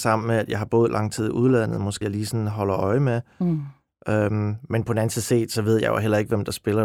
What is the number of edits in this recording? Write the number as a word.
one